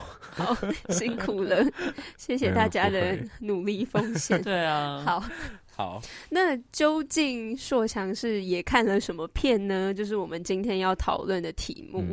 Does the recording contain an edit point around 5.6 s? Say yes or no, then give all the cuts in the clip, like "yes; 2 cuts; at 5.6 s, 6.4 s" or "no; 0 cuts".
no; 0 cuts